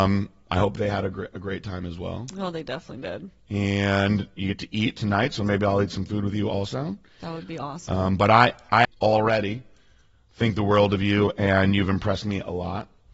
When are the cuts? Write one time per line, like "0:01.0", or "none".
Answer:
0:08.8

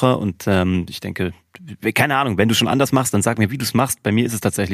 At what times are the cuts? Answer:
none

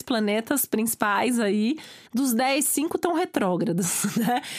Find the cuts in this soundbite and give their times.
0:02.1

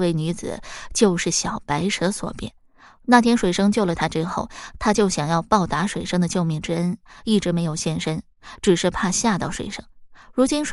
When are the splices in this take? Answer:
none

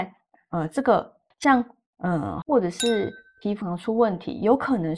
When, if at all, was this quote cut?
0:01.3
0:02.4
0:03.6

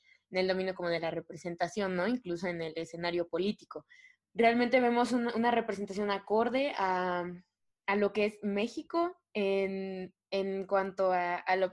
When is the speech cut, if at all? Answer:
0:04.2

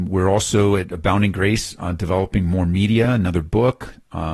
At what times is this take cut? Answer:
none

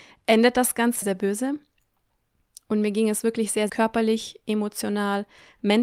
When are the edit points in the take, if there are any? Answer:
0:01.0
0:03.7

